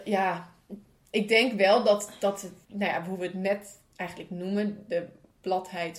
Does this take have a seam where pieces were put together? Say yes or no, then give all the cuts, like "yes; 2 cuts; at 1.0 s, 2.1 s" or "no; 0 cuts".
yes; 1 cut; at 2.6 s